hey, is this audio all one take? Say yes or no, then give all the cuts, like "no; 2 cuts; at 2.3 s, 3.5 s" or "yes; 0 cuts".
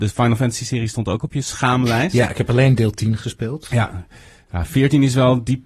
yes; 0 cuts